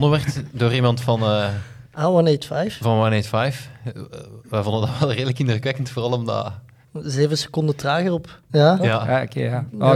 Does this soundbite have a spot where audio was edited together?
yes; 2 cuts; at 6.8 s, 8.5 s

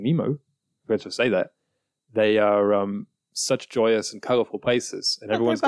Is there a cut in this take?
no; 0 cuts

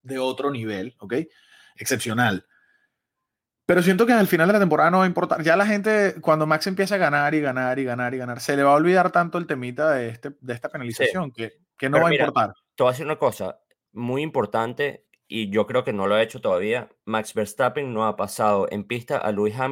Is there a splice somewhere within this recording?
no; 0 cuts

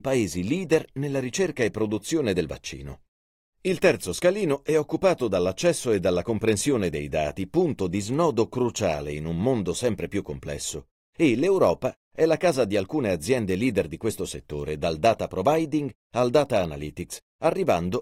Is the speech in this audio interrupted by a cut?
yes; 1 cut; at 3.4 s

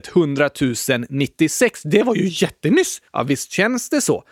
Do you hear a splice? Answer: yes; 1 cut; at 3.1 s

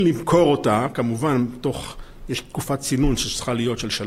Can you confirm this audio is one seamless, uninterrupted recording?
yes; 0 cuts

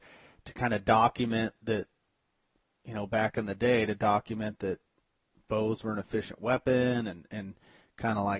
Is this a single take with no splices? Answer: yes; 0 cuts

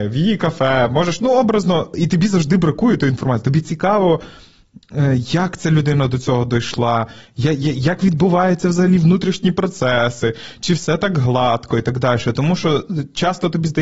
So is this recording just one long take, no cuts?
yes; 0 cuts

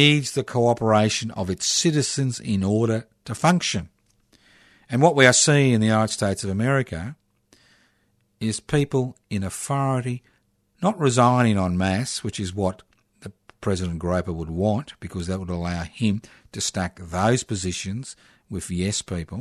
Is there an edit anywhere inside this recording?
no; 0 cuts

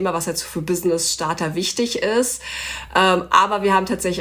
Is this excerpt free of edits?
yes; 0 cuts

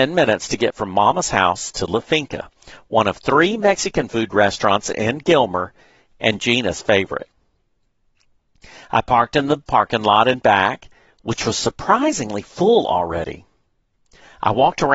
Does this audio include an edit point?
no; 0 cuts

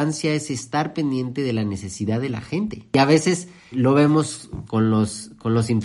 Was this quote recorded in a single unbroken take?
no; 1 cut; at 4.7 s

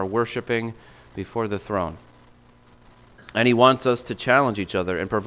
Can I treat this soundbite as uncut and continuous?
yes; 0 cuts

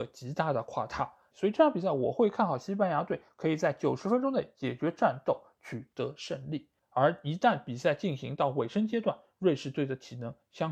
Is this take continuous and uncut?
no; 2 cuts; at 1.3 s, 6.8 s

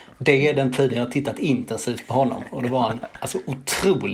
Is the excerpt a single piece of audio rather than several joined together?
yes; 0 cuts

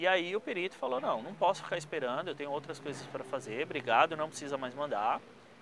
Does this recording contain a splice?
no; 0 cuts

